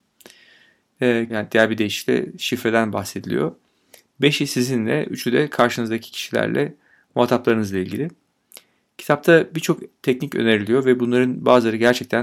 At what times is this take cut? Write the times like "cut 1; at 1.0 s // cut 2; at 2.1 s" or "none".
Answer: cut 1; at 1.3 s